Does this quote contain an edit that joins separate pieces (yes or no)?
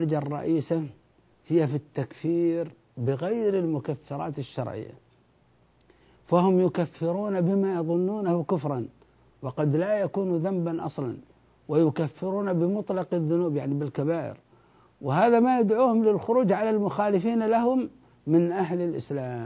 no